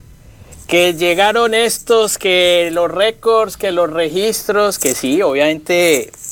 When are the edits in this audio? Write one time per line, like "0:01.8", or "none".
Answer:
none